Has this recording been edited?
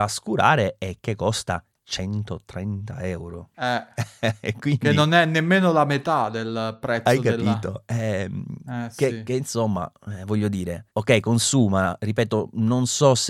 no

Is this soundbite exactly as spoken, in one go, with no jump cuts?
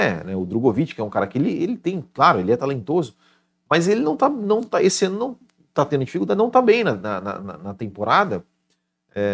yes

